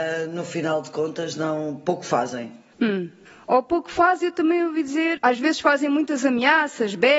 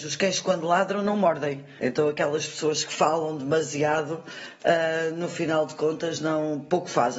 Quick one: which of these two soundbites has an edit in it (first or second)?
second